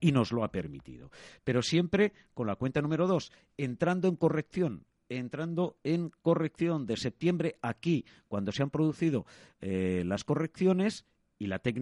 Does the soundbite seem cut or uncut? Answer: uncut